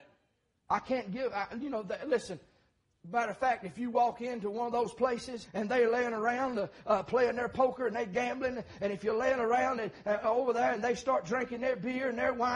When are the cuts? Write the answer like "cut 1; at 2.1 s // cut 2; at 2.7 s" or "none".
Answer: cut 1; at 5.4 s